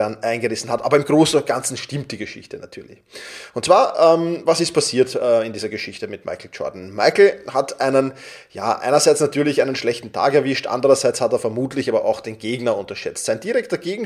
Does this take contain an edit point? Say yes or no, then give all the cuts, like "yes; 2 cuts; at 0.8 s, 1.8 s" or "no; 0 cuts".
no; 0 cuts